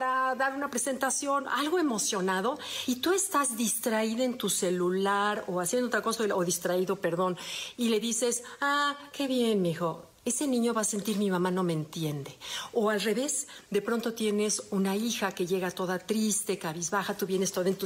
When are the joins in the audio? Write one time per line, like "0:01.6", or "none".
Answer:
none